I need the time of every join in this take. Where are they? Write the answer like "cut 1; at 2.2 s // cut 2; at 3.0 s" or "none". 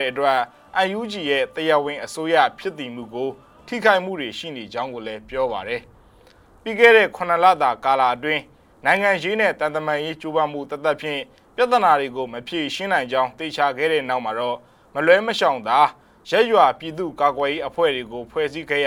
none